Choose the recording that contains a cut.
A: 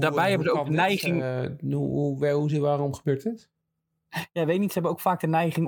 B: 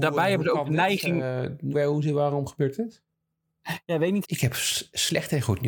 B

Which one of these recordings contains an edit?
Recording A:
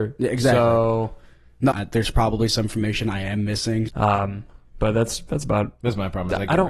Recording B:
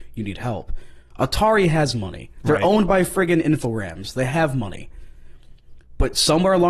A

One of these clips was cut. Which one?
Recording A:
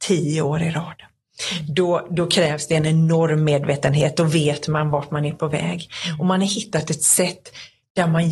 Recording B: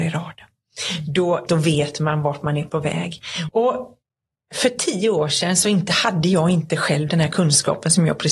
B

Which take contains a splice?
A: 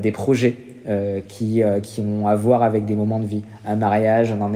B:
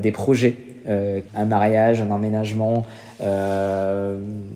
B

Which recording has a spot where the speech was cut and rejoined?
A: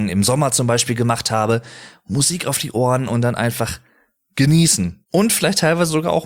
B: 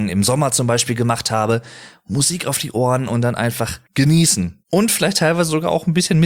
B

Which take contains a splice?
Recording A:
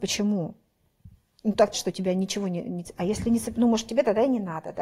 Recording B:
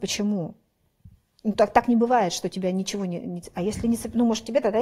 A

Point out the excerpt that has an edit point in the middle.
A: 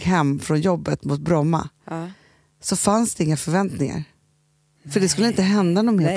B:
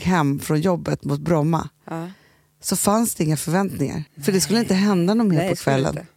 B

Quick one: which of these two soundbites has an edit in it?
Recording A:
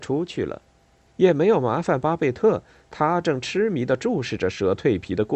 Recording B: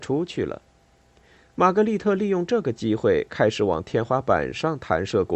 A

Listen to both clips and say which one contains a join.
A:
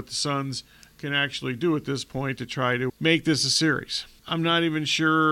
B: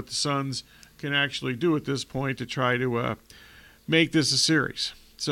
A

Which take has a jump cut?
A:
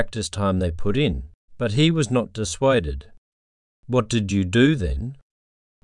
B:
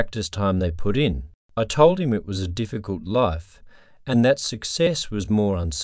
A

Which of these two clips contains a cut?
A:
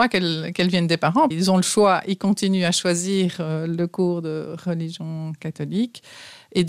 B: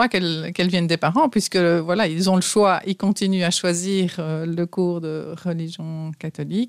A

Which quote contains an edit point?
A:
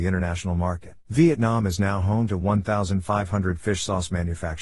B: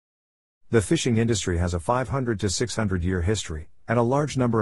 A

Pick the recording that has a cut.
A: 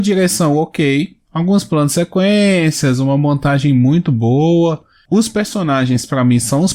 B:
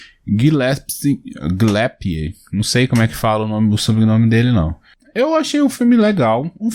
A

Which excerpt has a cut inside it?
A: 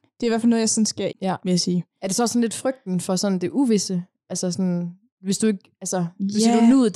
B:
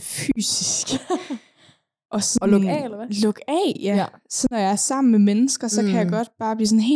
A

